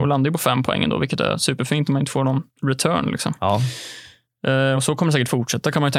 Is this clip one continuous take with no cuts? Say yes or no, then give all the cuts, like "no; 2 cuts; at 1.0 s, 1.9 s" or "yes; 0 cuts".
yes; 0 cuts